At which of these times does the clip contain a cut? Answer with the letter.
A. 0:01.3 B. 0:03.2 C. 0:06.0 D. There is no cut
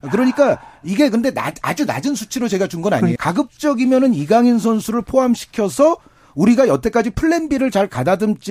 B